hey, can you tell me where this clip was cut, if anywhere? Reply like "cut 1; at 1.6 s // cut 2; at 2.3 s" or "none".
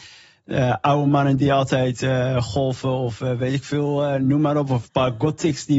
none